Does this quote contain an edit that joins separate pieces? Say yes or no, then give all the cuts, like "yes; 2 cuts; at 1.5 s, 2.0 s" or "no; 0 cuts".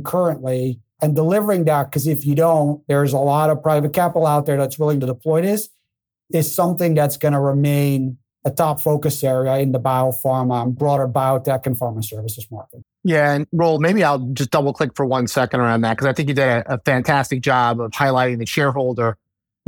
yes; 1 cut; at 12.8 s